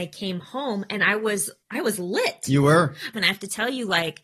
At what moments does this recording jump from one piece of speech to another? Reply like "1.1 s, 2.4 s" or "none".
1.6 s, 3.1 s